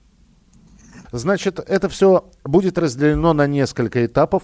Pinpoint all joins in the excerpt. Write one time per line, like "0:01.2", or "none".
0:01.1